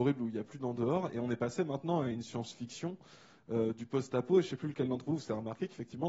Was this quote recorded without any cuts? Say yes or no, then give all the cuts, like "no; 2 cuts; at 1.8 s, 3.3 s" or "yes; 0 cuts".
yes; 0 cuts